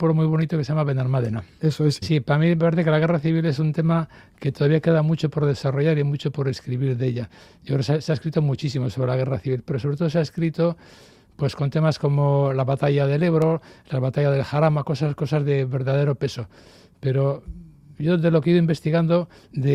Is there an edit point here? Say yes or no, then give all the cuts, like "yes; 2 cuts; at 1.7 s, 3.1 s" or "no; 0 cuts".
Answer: yes; 1 cut; at 2.0 s